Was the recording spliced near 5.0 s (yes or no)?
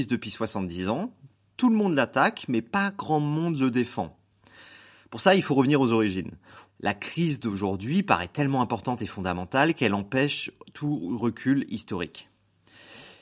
no